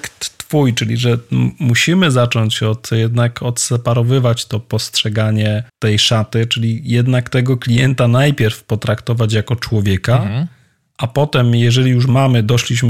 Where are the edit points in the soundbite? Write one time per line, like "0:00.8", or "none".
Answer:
0:05.7